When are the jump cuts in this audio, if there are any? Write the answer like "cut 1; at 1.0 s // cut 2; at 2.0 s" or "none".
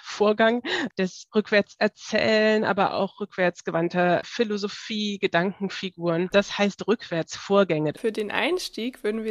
cut 1; at 6.3 s // cut 2; at 7.9 s